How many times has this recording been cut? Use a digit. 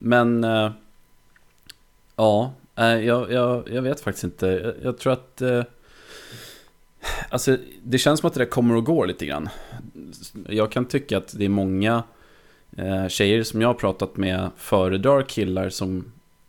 1